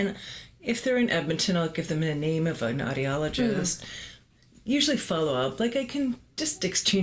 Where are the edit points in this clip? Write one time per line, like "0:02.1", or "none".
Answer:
none